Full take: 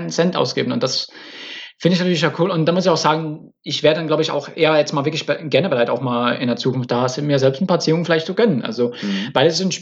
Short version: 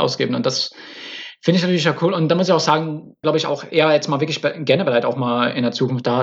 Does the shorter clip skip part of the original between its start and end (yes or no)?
yes